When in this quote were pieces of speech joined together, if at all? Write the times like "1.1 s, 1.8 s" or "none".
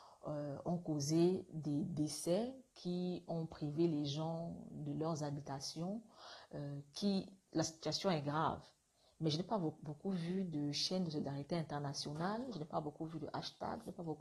7.5 s